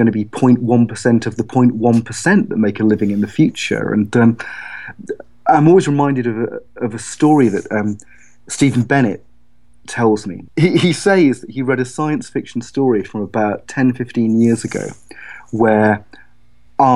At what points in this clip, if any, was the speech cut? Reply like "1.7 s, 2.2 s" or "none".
10.5 s